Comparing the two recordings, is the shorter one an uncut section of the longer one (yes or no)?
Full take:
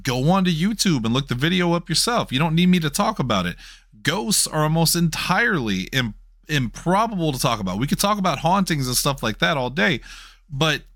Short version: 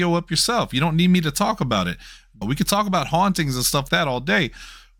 no